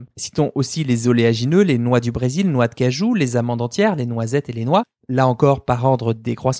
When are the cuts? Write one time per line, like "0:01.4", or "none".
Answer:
none